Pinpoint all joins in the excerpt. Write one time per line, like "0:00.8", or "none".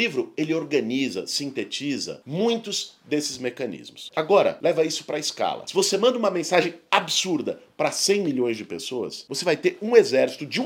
0:04.1